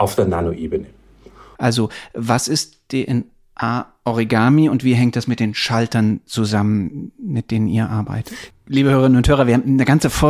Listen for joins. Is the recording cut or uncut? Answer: cut